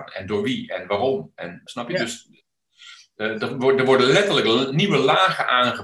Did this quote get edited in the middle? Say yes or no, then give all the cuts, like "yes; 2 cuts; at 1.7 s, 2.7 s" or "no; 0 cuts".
yes; 1 cut; at 1.7 s